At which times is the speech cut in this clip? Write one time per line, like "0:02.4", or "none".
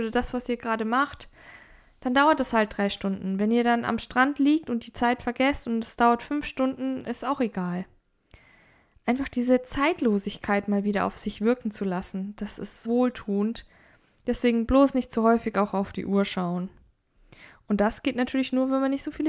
0:12.8